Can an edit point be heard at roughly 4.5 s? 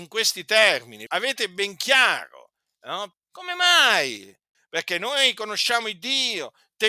yes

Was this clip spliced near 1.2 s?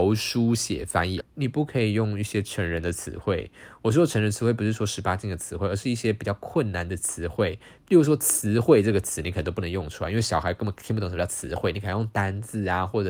yes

